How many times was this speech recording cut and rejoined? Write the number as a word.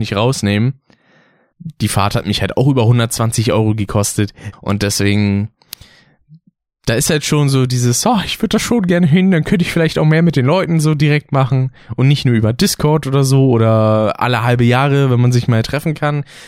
two